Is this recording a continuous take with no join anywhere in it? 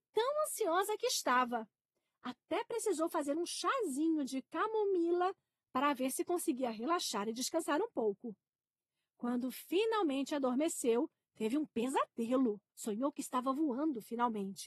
no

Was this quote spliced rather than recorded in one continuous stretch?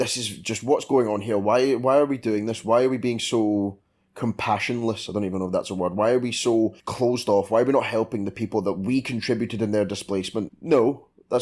yes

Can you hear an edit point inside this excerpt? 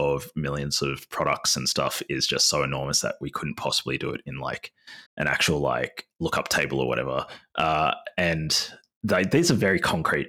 yes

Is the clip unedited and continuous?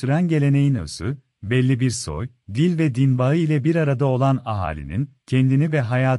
yes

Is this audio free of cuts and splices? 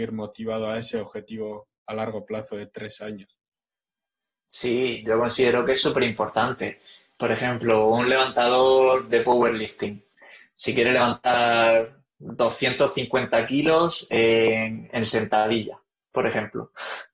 yes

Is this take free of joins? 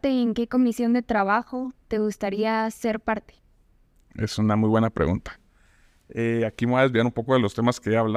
yes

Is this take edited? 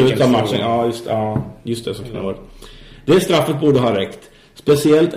no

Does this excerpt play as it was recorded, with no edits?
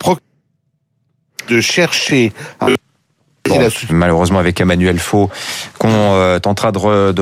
no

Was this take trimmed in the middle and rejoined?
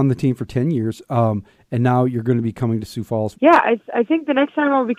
yes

